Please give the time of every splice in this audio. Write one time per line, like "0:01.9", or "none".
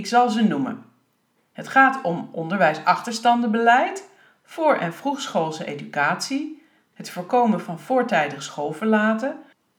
0:06.9